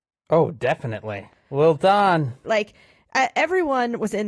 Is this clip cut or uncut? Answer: cut